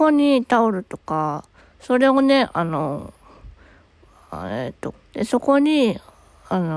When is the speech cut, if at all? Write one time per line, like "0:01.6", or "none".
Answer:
0:01.6
0:04.9